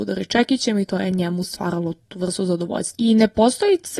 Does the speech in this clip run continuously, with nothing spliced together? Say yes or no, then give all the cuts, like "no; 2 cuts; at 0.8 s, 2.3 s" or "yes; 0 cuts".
no; 1 cut; at 3.0 s